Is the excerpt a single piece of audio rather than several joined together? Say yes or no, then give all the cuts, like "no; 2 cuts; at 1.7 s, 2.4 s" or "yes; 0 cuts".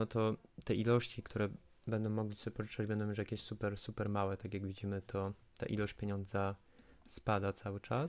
yes; 0 cuts